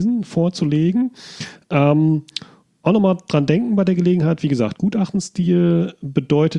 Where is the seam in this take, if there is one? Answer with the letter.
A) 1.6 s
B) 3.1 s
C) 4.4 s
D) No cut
D